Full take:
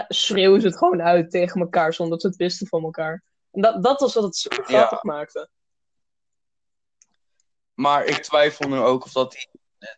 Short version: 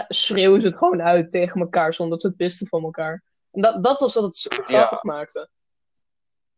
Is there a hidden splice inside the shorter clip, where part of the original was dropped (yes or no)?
no